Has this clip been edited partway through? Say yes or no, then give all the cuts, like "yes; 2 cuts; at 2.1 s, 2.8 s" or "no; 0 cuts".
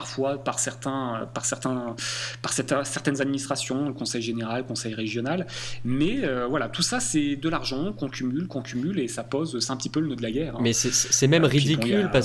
no; 0 cuts